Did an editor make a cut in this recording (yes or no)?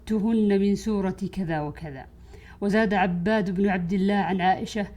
no